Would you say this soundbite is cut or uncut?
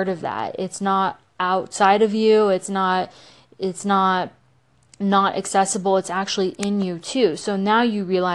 uncut